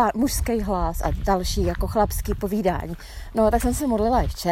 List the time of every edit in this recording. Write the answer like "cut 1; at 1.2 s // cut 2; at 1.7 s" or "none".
cut 1; at 3.3 s